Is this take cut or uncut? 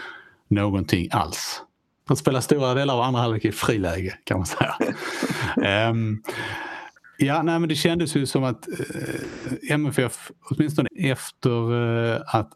cut